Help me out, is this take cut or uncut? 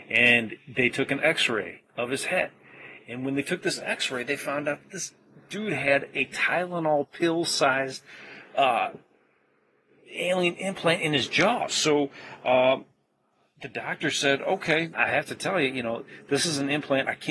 cut